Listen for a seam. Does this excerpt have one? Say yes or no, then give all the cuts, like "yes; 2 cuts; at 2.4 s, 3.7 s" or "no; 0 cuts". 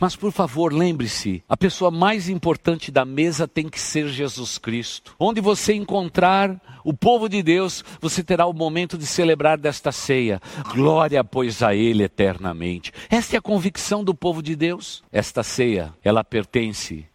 yes; 3 cuts; at 5.2 s, 10.6 s, 15.0 s